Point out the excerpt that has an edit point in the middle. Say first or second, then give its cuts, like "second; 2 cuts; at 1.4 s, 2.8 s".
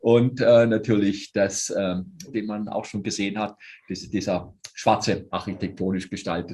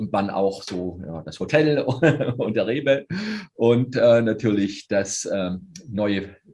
first; 2 cuts; at 2.3 s, 5.3 s